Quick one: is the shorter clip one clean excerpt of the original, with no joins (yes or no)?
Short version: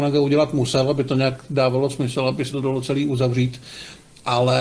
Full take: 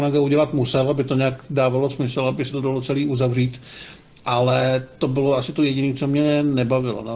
yes